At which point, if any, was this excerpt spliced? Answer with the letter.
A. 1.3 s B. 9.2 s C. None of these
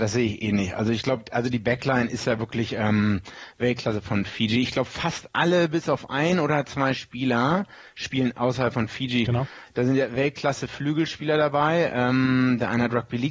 B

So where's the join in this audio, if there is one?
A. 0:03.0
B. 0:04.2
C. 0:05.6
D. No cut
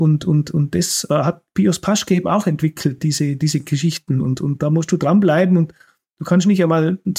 D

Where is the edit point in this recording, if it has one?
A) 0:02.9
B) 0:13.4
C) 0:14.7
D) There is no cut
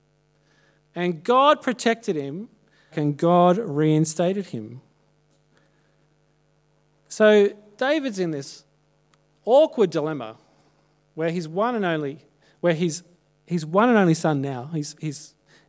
A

